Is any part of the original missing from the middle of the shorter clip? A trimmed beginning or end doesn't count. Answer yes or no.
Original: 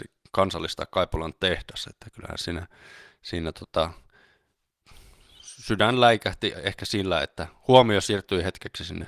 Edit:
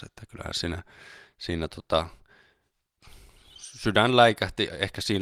no